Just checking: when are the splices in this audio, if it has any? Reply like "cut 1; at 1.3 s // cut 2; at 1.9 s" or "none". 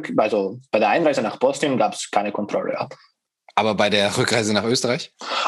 none